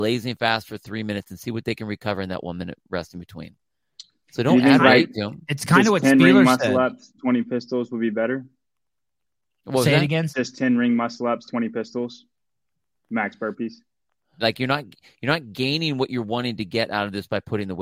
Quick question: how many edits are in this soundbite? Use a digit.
2